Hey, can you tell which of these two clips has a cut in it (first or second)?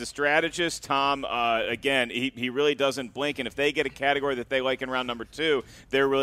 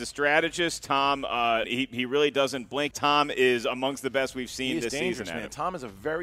second